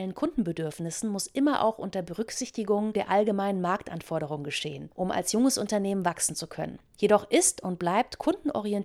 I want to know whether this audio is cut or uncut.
uncut